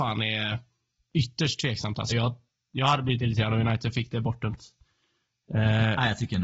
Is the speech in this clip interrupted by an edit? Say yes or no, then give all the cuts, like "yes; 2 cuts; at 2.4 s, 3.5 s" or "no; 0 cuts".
no; 0 cuts